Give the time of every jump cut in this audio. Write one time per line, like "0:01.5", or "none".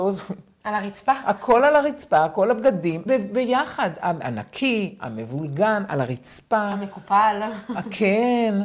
0:03.1